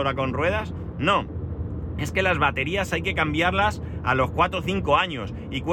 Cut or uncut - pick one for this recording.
uncut